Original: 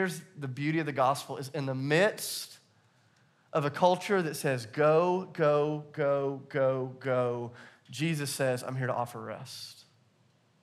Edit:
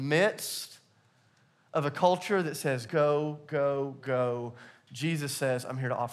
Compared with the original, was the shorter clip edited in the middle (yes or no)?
yes